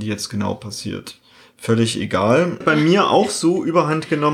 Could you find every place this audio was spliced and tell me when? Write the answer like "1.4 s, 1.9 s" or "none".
2.6 s